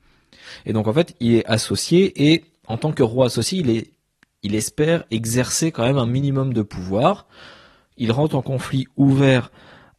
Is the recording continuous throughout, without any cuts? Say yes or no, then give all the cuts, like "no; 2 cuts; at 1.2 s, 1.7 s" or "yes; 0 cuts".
yes; 0 cuts